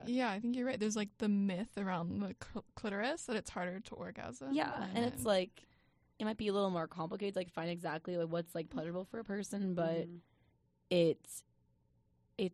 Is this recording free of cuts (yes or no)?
yes